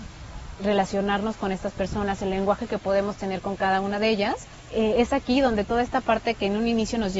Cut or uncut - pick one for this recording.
cut